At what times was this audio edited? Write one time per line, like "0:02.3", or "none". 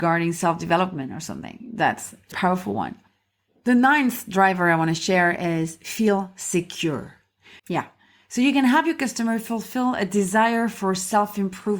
0:02.3
0:07.6